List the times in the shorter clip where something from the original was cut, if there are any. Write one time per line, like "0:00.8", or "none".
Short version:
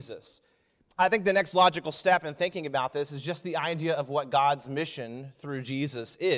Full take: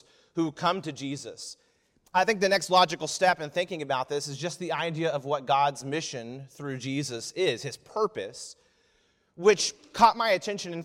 none